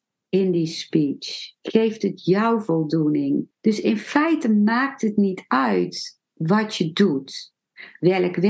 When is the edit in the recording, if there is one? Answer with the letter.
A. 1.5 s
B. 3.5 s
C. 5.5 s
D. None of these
B